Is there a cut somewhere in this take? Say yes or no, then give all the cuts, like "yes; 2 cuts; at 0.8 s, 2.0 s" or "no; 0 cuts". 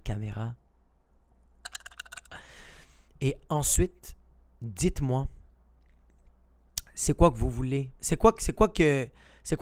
yes; 1 cut; at 7.9 s